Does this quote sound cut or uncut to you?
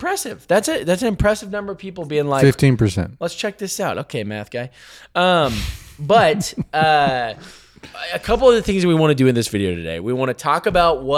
uncut